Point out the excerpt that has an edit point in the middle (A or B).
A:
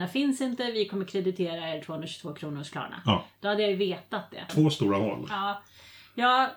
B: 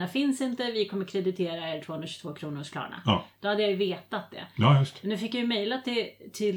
A